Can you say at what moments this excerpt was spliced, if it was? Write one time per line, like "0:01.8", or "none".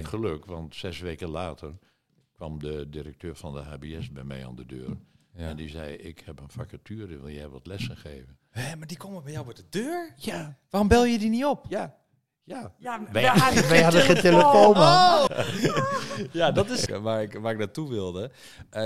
0:15.3
0:16.9

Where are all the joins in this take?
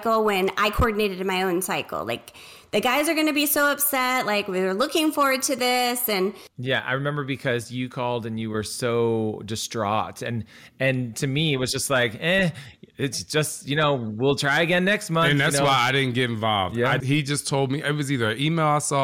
0:17.0

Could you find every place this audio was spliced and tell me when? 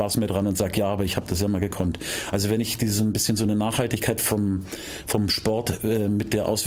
none

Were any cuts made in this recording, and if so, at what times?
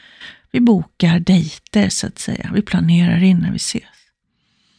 none

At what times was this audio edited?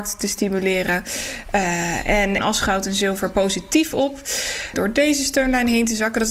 0:02.4
0:04.7

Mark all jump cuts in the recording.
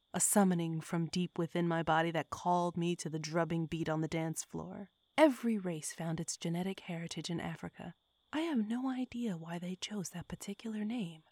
0:05.0
0:08.2

